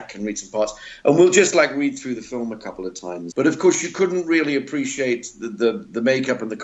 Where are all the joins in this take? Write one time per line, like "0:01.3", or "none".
0:03.3